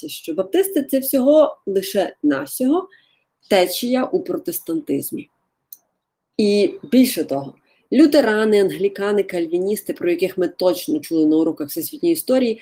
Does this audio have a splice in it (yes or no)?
no